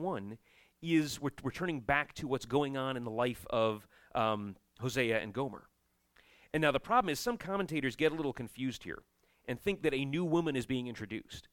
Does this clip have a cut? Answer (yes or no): no